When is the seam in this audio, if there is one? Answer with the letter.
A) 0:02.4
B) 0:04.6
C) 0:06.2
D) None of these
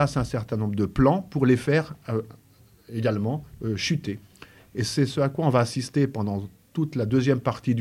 D